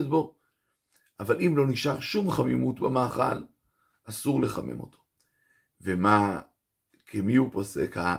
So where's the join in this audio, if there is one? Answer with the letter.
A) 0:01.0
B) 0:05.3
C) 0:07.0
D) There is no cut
D